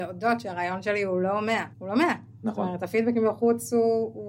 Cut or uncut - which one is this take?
cut